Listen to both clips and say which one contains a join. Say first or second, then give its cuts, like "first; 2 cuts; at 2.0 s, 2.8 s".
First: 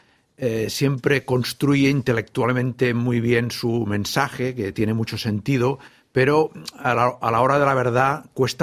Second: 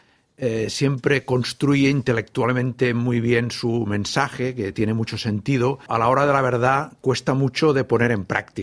second; 1 cut; at 5.9 s